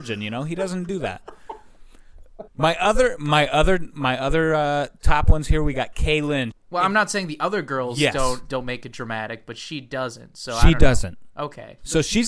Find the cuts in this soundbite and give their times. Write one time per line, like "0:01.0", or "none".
0:02.5
0:06.5